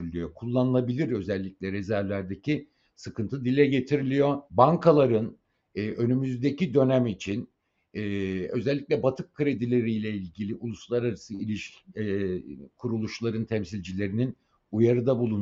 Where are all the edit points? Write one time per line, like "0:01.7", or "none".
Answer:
0:04.5